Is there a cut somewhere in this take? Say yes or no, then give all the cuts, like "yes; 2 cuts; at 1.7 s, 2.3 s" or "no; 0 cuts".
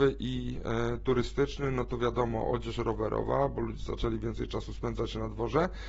no; 0 cuts